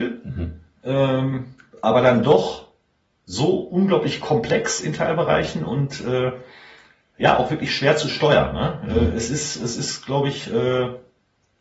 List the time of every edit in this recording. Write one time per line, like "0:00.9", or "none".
none